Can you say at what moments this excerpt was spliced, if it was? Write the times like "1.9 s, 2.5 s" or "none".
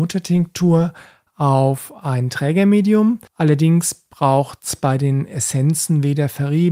3.3 s